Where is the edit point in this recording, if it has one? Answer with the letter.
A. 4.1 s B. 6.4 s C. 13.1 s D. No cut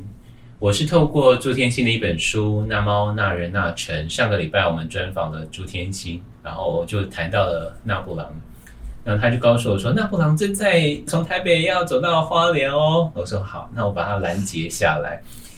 D